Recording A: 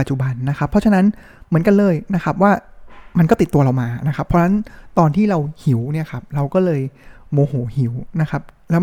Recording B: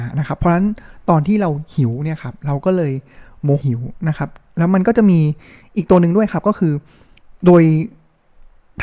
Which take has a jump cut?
B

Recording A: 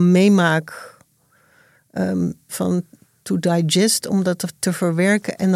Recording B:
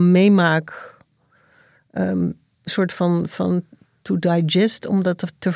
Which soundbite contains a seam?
A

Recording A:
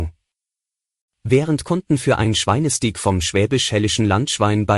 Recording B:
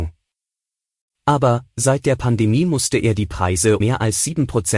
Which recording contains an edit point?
B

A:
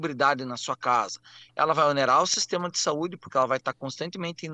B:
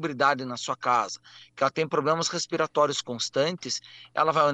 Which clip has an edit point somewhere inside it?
A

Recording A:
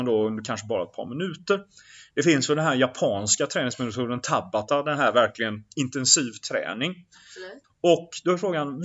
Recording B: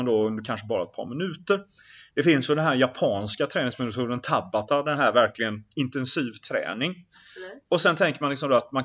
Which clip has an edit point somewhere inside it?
A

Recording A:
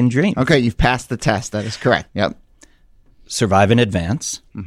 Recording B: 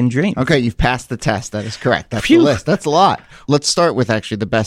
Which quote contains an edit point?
A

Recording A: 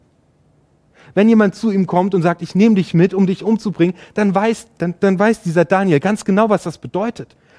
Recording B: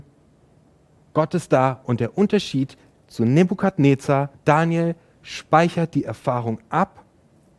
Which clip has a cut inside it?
B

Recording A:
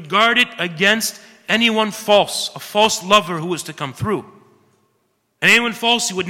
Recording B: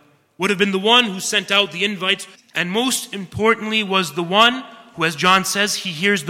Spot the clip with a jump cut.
B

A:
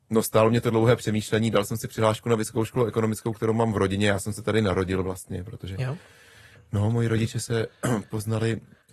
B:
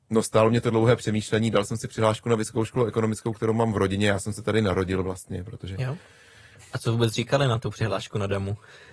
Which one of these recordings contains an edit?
B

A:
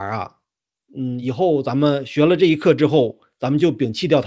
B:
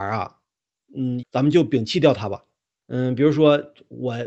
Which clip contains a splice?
B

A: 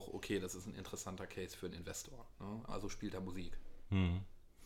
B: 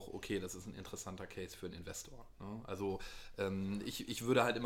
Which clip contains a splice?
A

